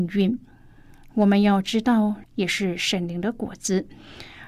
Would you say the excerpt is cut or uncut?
cut